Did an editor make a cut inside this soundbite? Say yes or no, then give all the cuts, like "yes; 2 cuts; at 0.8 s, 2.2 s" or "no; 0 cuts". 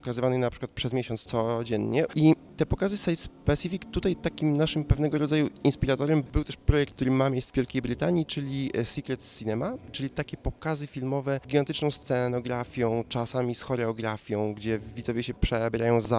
yes; 1 cut; at 2.1 s